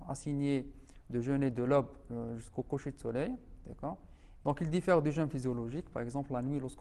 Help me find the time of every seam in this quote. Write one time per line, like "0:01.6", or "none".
0:04.4